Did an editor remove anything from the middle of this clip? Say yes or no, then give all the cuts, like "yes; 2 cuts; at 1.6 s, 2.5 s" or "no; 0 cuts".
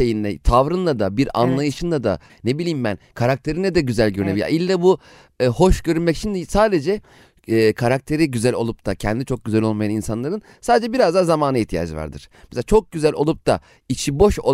yes; 1 cut; at 2.3 s